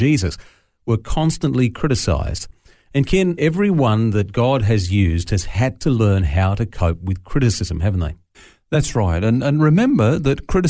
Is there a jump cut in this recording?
yes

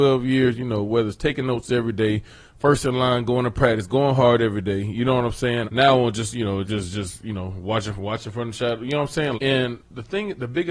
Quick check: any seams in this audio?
yes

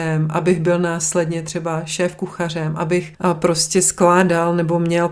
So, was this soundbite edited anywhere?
yes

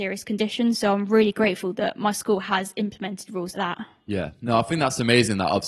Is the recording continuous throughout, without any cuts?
no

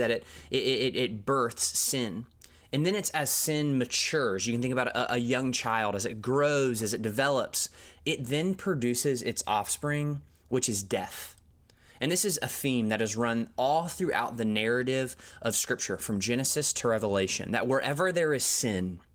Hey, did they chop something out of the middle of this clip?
no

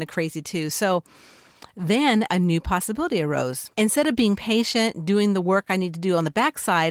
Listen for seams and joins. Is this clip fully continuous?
no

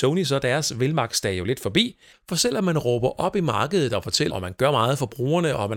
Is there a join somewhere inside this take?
yes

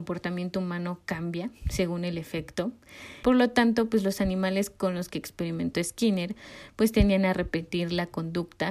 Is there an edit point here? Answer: yes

